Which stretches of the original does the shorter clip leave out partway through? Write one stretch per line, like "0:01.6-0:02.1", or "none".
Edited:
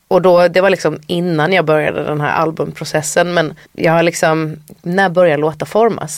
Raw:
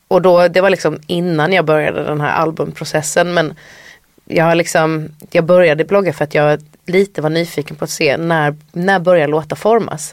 0:03.6-0:04.2
0:05.3-0:08.7